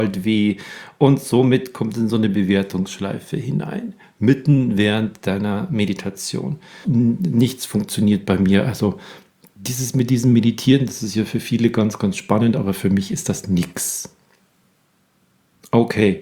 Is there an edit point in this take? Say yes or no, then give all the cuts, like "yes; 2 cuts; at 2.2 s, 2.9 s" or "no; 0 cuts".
yes; 1 cut; at 6.8 s